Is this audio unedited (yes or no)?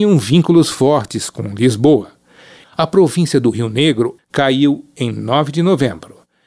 no